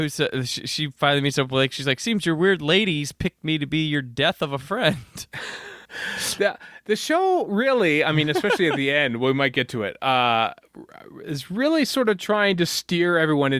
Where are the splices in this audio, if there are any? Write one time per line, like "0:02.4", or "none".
0:05.8